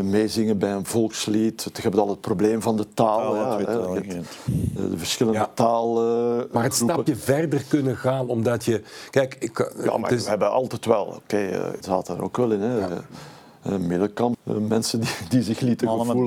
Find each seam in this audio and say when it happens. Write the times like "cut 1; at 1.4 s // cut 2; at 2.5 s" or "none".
cut 1; at 11.8 s // cut 2; at 14.3 s